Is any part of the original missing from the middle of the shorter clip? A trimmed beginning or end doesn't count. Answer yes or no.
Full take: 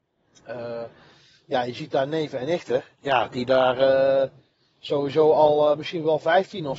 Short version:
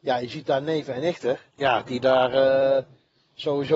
no